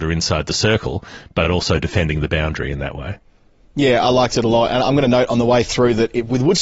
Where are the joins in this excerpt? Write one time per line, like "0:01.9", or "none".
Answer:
none